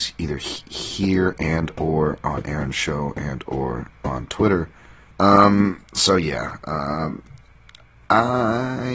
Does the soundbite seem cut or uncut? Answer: cut